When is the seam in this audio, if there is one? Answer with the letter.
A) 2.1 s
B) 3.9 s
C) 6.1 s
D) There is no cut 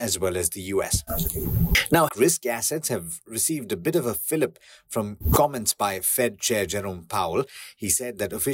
A